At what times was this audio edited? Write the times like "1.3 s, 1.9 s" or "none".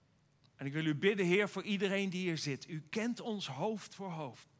none